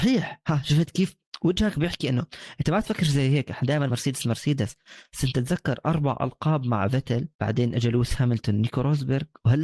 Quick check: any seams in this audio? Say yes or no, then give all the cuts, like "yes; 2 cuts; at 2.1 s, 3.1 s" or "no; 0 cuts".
yes; 2 cuts; at 3.9 s, 7.3 s